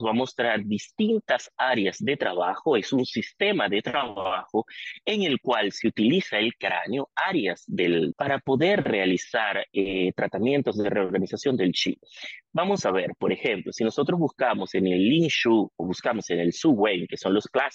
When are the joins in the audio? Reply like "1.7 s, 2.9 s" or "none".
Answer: 8.1 s